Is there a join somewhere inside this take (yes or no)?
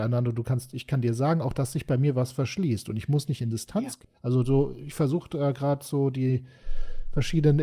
yes